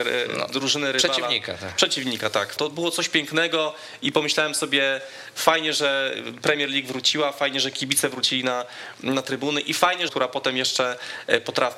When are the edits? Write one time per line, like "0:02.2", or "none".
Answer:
0:02.6
0:10.1